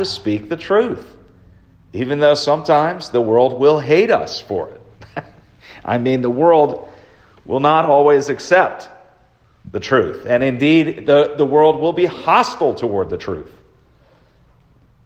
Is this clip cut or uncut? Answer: uncut